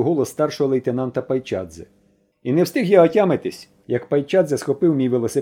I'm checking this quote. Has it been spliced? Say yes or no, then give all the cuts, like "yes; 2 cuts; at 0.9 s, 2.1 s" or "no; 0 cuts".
yes; 1 cut; at 2.3 s